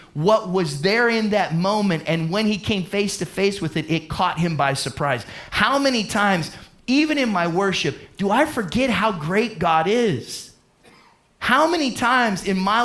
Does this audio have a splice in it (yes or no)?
no